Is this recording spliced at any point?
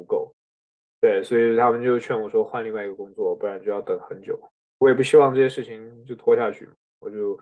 no; 0 cuts

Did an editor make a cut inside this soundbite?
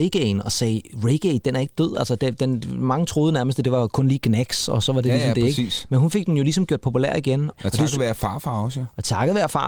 no; 0 cuts

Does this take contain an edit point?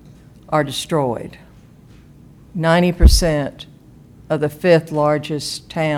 no; 0 cuts

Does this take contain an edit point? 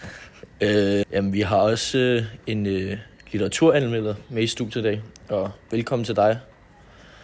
yes; 1 cut; at 1.0 s

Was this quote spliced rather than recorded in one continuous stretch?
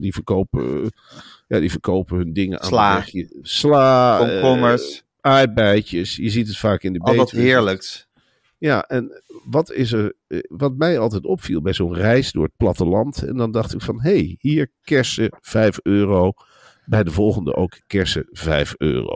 no; 0 cuts

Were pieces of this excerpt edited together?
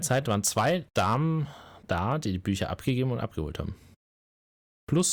no; 0 cuts

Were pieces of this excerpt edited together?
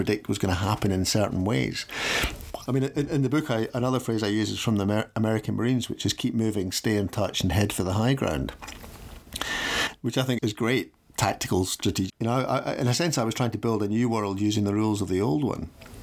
yes; 3 cuts; at 2.7 s, 10.4 s, 12.1 s

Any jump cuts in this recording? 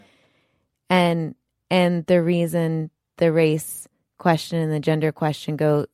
no; 0 cuts

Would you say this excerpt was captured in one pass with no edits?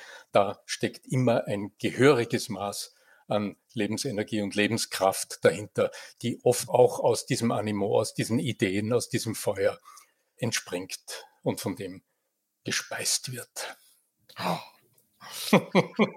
no; 1 cut; at 6.7 s

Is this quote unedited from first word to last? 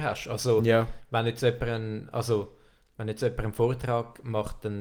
yes; 0 cuts

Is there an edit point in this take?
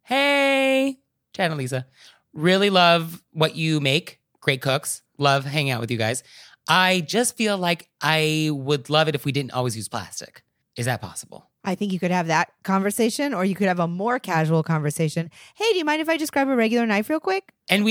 no; 0 cuts

